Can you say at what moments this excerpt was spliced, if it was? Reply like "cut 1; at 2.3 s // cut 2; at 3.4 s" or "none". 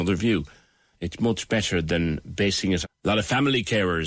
cut 1; at 0.9 s // cut 2; at 2.8 s